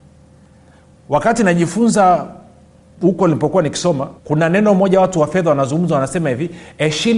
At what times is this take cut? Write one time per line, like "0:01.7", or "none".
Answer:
0:04.2

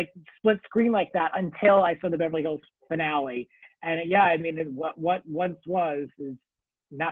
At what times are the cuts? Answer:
none

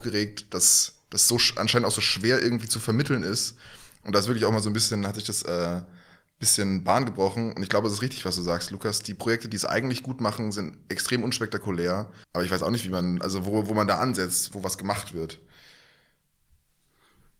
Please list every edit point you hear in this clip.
0:12.2
0:14.5

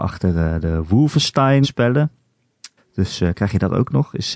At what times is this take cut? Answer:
0:01.6
0:02.8

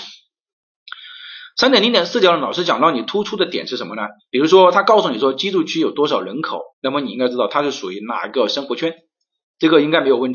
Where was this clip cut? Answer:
0:04.2
0:06.7

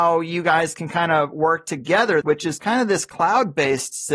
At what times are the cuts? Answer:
0:02.2

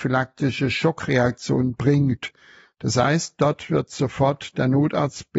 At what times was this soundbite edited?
none

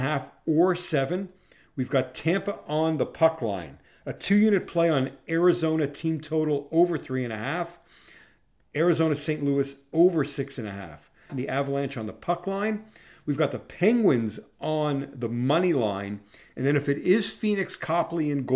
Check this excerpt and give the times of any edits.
0:11.3

